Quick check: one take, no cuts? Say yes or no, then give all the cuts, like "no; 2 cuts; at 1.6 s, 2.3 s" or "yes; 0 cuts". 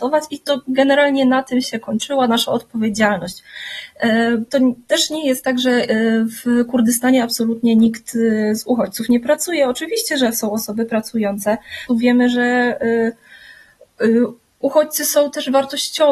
no; 2 cuts; at 4.5 s, 11.9 s